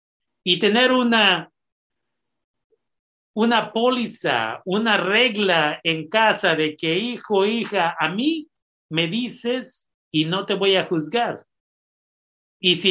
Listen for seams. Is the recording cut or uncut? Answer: uncut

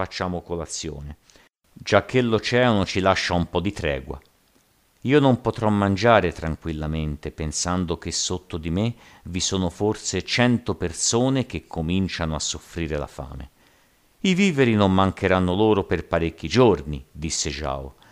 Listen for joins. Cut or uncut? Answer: uncut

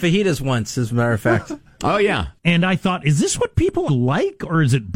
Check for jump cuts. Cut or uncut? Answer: cut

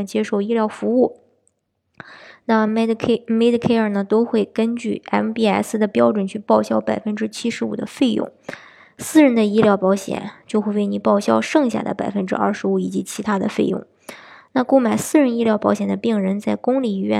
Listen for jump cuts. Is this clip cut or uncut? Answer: uncut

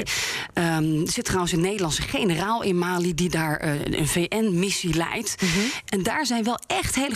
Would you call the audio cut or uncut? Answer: cut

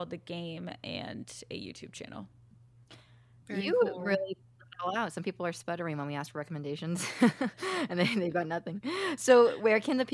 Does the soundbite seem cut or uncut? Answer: uncut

